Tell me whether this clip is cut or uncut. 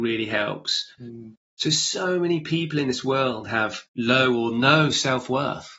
cut